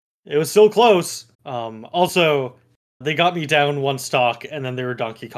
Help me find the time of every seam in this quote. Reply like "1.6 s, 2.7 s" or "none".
1.3 s, 3.0 s